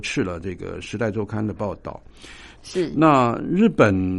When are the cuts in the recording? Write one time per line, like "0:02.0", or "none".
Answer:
0:02.6